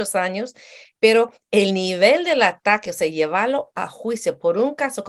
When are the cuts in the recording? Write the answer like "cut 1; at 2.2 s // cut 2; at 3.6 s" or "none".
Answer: none

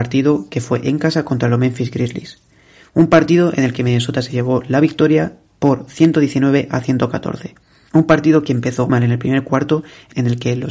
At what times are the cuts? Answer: cut 1; at 8.9 s

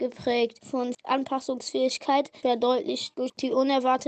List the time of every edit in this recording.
cut 1; at 2.4 s

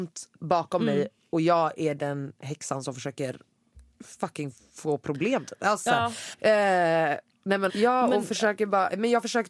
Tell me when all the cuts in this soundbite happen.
cut 1; at 6.3 s // cut 2; at 7.7 s

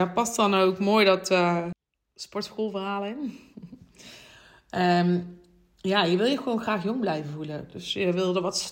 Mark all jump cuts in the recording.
none

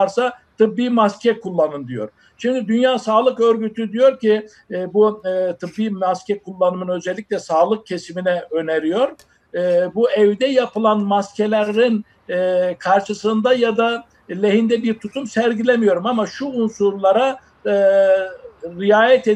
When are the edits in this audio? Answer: none

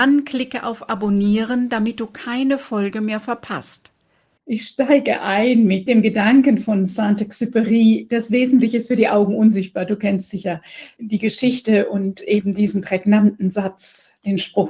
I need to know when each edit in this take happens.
cut 1; at 4.4 s

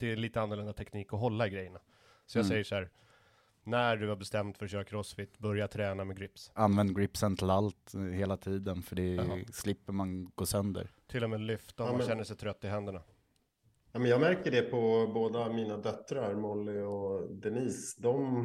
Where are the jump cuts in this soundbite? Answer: cut 1; at 6.6 s

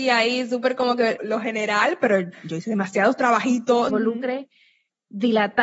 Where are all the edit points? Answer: cut 1; at 1.2 s // cut 2; at 3.9 s

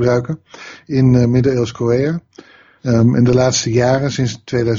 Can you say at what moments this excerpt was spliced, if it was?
cut 1; at 2.8 s

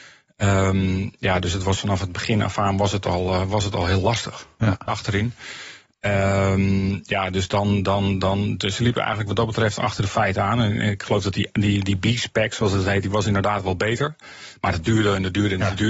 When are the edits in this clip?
cut 1; at 4.9 s

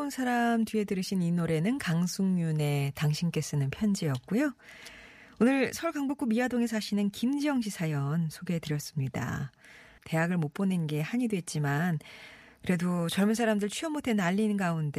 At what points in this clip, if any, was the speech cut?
cut 1; at 10.0 s

